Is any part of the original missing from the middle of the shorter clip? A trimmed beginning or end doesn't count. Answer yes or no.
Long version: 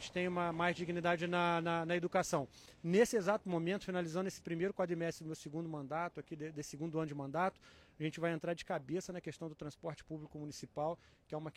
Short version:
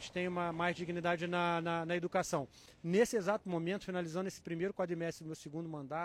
no